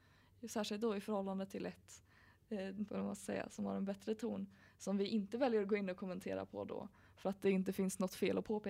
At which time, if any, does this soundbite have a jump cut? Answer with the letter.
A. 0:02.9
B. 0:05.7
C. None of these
A